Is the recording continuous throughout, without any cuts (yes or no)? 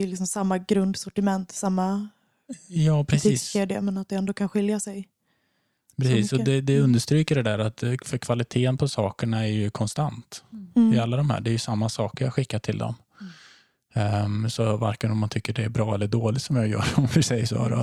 yes